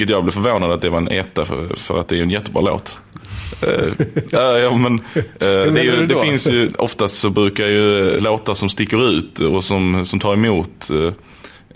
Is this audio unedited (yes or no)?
no